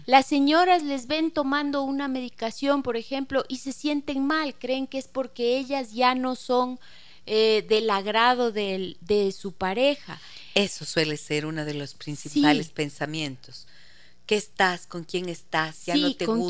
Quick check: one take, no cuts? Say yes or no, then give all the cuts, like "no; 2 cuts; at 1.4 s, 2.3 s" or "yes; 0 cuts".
yes; 0 cuts